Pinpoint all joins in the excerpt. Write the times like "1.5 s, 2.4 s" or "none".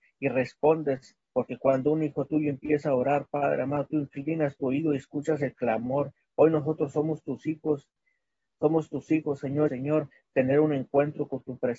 9.7 s